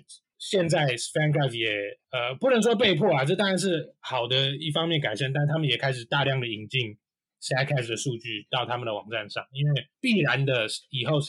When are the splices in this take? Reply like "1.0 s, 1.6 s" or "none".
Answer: none